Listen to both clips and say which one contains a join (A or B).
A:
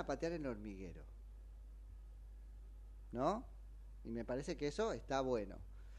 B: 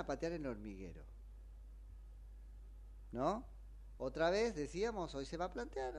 B